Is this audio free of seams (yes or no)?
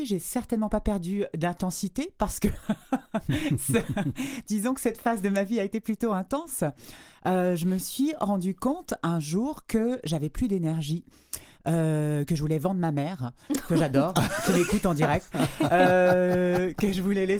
yes